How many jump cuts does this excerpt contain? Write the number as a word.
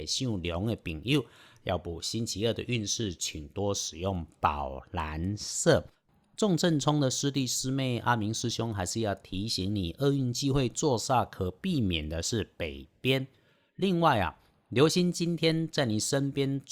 zero